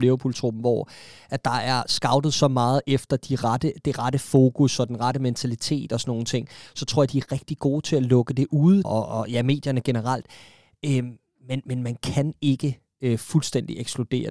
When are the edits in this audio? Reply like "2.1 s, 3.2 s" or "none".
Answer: 8.8 s